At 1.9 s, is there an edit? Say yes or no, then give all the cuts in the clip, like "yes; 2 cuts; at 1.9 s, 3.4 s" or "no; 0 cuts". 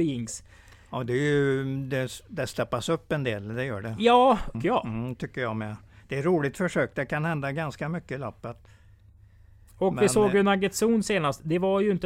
no; 1 cut; at 4.5 s